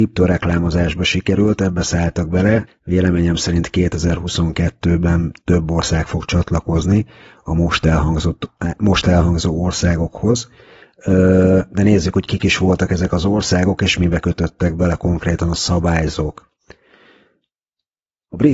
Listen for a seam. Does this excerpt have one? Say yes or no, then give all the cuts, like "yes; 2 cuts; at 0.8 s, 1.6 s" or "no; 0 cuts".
yes; 1 cut; at 2.7 s